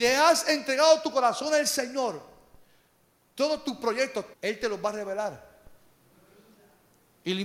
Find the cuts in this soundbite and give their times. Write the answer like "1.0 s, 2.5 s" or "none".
4.3 s